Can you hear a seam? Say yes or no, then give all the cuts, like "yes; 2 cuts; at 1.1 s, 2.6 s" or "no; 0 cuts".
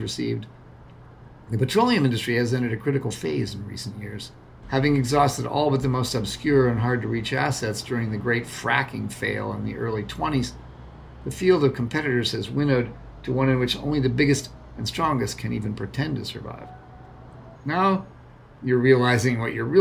yes; 2 cuts; at 4.6 s, 17.6 s